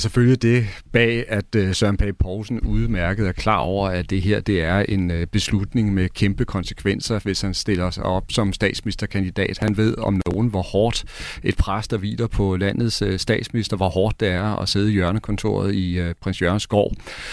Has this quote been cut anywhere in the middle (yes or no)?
no